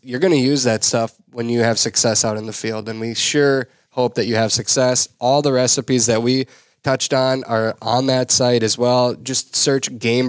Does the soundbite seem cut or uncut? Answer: uncut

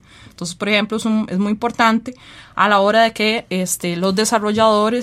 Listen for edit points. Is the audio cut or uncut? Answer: uncut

